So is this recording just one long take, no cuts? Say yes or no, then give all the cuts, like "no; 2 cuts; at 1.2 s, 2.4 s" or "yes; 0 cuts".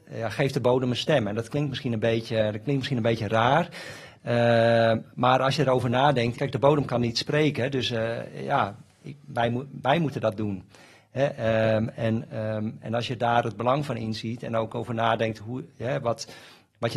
no; 1 cut; at 6.3 s